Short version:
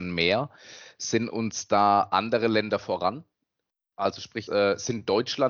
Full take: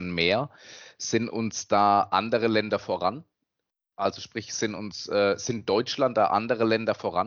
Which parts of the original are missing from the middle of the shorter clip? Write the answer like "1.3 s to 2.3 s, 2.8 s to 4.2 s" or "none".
4.5 s to 5.1 s

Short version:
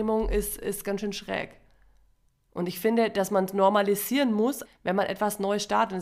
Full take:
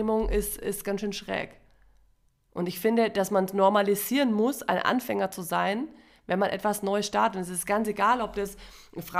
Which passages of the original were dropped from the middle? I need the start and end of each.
4.6 s to 6.1 s

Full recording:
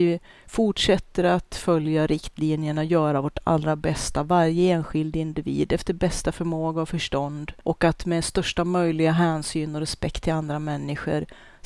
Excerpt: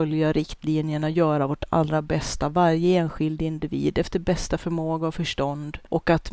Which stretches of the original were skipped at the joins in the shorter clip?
none

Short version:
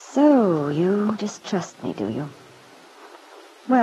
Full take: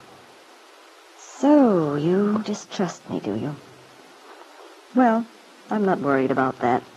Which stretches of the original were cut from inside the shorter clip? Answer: none

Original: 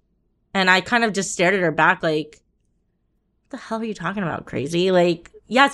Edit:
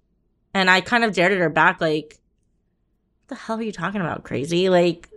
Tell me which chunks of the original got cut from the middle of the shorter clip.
1.1 s to 1.3 s

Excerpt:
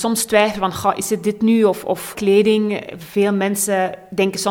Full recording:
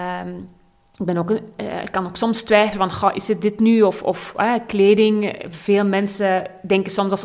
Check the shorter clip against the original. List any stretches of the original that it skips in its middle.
4.3 s to 4.7 s

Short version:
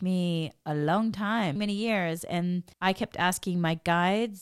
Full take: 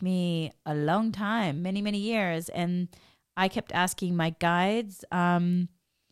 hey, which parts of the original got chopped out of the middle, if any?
1.6 s to 1.8 s, 3.0 s to 3.3 s

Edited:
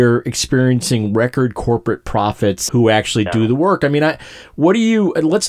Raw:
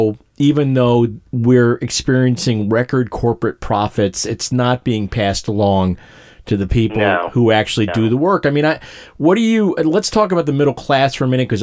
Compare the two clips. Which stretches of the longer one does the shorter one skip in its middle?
4.2 s to 7.3 s

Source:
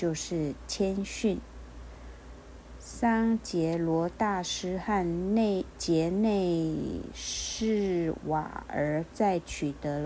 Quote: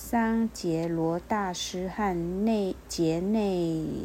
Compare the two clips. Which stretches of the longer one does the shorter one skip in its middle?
none

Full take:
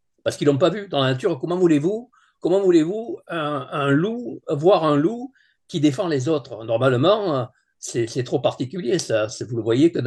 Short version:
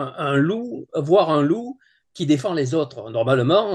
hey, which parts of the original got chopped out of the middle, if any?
none

